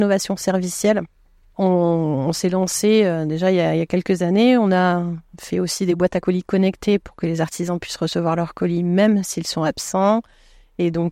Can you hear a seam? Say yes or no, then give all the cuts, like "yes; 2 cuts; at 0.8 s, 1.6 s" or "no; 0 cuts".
no; 0 cuts